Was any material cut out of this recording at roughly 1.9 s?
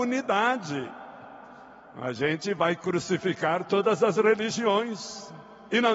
yes; 1 cut; at 1.9 s

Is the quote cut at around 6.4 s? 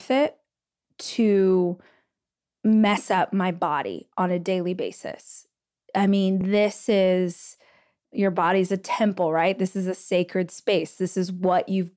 no; 0 cuts

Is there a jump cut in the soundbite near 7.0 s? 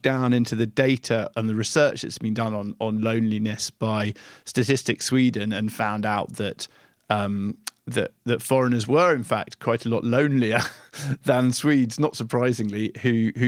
no; 0 cuts

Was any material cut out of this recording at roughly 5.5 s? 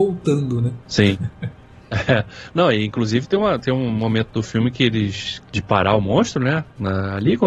yes; 1 cut; at 5.5 s

